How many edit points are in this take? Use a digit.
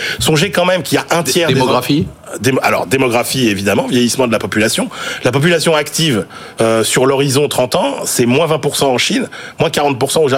0